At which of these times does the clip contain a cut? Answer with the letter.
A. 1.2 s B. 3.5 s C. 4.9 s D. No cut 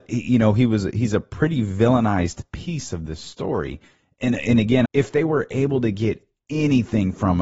C